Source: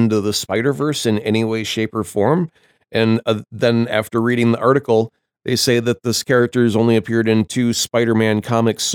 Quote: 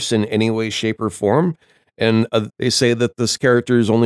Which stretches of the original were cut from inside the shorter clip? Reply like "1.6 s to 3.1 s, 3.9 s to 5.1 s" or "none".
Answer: 3.4 s to 5.4 s